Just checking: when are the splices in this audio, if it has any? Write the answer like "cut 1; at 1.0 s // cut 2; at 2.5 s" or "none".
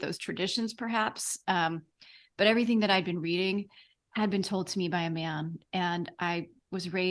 none